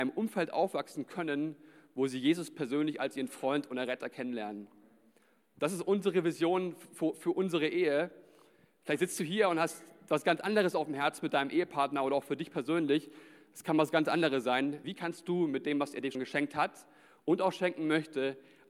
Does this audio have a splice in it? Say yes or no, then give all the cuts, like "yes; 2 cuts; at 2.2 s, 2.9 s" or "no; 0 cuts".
yes; 2 cuts; at 14.8 s, 16.1 s